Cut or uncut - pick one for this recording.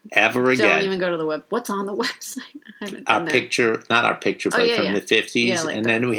cut